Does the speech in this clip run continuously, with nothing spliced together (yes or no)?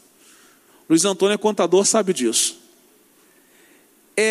yes